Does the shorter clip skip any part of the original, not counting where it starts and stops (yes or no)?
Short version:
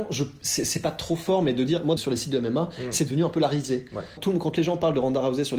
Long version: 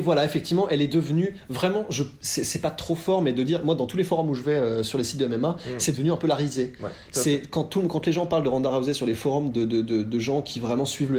yes